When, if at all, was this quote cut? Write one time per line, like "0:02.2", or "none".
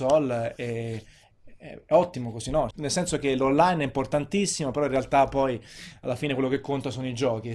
0:02.7